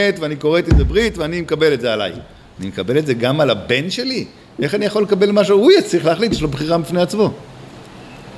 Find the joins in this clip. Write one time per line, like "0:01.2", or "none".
none